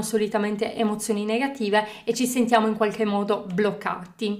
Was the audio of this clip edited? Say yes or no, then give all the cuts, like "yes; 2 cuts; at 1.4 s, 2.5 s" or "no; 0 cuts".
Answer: no; 0 cuts